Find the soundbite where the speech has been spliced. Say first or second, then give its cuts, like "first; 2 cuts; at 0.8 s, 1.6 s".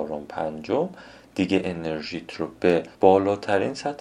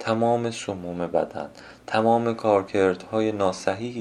first; 1 cut; at 2.9 s